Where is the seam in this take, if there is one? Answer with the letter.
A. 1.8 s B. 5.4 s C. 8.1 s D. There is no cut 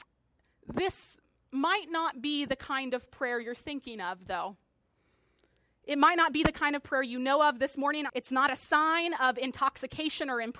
C